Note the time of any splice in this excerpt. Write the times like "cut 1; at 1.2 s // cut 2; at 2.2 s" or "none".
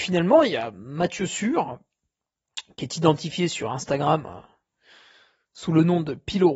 none